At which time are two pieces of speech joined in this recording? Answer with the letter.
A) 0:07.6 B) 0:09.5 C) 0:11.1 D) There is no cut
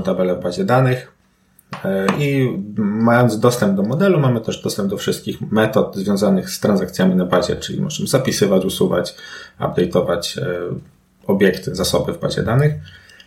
D